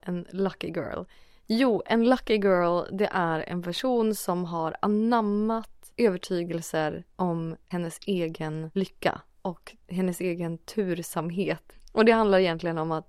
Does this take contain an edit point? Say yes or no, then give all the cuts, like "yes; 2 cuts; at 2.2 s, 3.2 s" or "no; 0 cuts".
no; 0 cuts